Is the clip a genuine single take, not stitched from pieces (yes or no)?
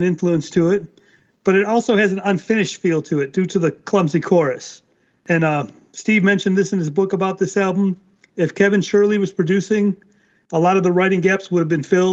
yes